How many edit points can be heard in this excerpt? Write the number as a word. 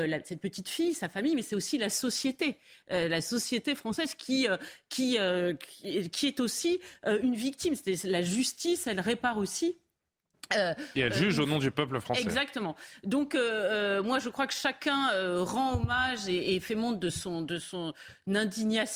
zero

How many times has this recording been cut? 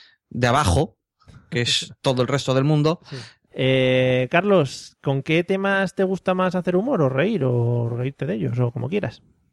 one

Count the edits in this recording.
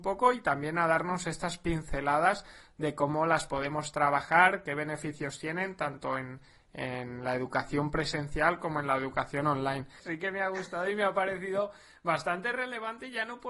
one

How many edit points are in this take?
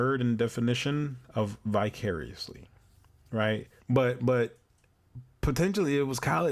one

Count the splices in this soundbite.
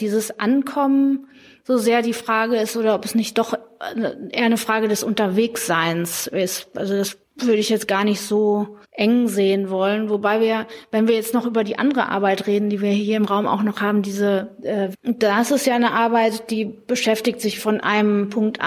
three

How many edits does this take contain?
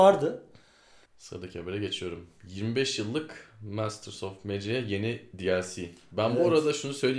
one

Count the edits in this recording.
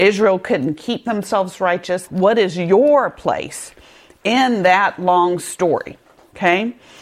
one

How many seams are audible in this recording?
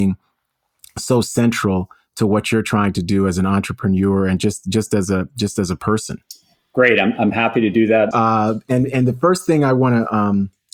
one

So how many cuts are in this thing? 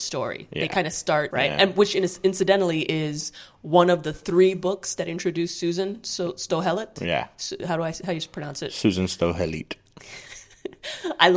one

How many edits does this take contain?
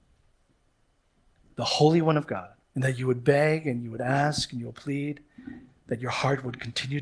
one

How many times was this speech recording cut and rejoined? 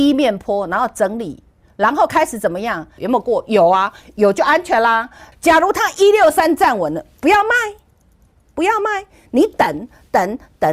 two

